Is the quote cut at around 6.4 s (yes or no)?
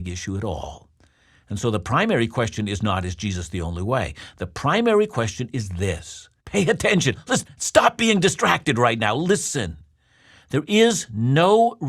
yes